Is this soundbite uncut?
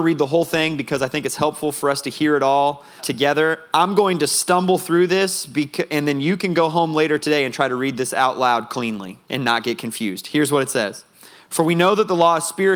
no; 2 cuts; at 3.0 s, 9.2 s

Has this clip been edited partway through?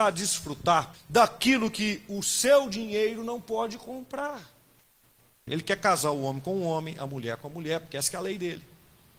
yes; 2 cuts; at 0.9 s, 5.5 s

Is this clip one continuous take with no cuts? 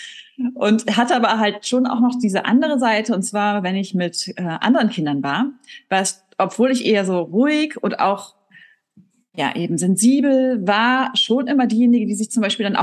yes; 0 cuts

